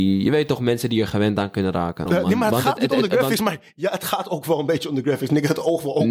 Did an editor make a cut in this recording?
yes; 1 cut; at 2.1 s

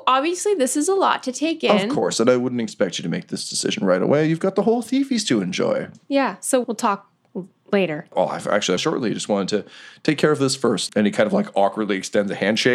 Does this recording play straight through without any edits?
no; 2 cuts; at 8.8 s, 10.9 s

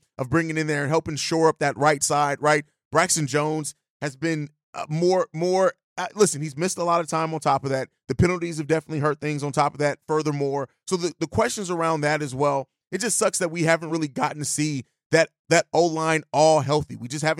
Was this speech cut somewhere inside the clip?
no; 0 cuts

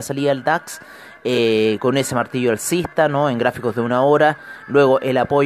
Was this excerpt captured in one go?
yes; 0 cuts

